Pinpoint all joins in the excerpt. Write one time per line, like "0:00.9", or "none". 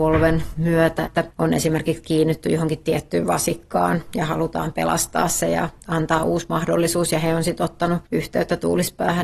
0:01.0